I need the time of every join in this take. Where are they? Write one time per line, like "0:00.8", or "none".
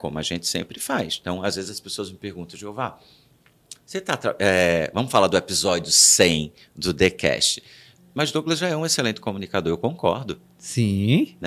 0:08.0